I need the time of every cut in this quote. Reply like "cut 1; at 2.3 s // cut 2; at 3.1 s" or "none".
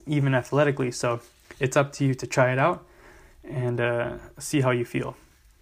none